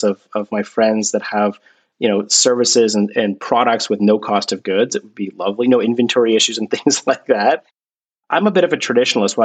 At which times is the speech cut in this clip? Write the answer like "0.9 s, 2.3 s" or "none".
none